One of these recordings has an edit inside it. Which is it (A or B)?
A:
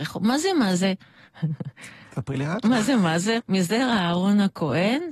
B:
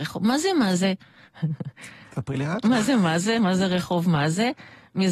A